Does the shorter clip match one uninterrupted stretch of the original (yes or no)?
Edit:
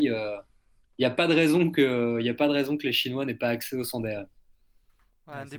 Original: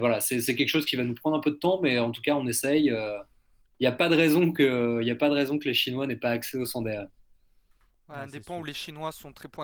yes